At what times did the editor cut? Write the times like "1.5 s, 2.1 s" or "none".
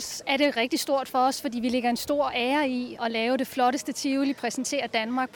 3.0 s